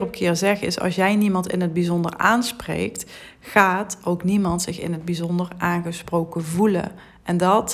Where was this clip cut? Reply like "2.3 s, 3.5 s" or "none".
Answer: none